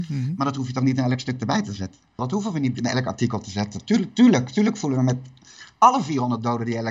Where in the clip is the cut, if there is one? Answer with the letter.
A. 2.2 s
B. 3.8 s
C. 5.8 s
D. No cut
A